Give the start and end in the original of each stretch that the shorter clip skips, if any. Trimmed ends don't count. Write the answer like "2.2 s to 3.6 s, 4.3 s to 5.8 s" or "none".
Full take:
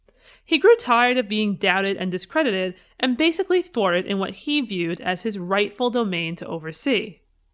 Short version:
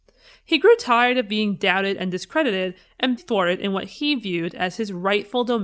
3.2 s to 3.6 s